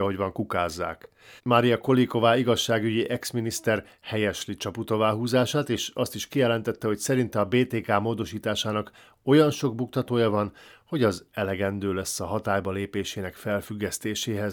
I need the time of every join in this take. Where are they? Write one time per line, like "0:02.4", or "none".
0:01.4